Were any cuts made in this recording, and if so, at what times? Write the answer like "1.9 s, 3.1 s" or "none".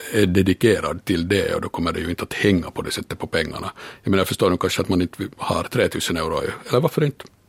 5.3 s

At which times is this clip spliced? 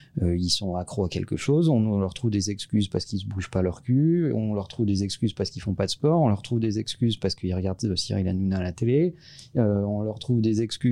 none

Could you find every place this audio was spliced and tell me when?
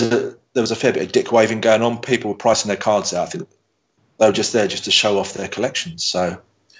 none

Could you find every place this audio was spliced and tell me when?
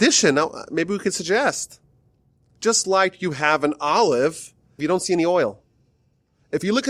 4.8 s

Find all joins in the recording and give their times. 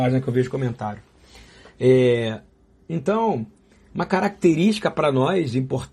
none

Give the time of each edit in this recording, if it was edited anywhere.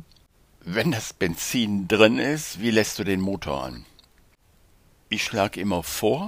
none

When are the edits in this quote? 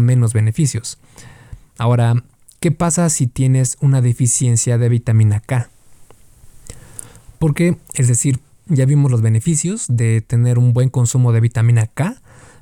8.7 s

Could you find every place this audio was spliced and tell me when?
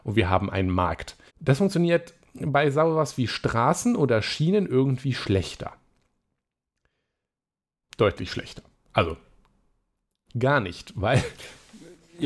1.3 s

